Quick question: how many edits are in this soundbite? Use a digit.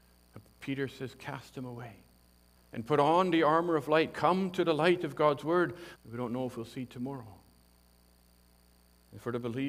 2